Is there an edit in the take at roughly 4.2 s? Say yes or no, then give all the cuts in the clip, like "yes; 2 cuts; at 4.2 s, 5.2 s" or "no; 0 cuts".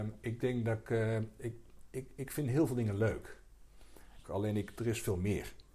yes; 1 cut; at 4.2 s